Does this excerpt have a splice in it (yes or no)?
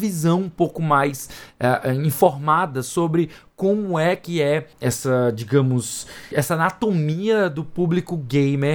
yes